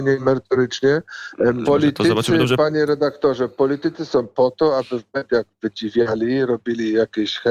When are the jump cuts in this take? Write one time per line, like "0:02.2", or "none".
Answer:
0:01.6